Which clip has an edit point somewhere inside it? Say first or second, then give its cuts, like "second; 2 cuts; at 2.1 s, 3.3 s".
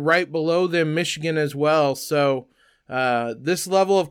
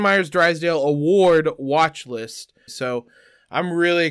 second; 1 cut; at 2.7 s